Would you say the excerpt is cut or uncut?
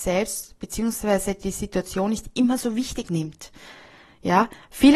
uncut